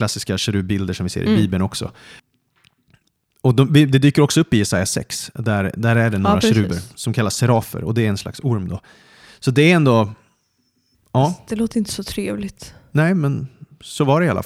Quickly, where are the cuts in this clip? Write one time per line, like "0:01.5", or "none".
none